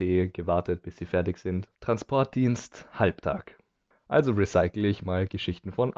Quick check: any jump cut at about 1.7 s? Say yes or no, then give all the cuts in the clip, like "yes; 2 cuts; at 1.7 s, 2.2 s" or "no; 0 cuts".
yes; 2 cuts; at 1.7 s, 3.9 s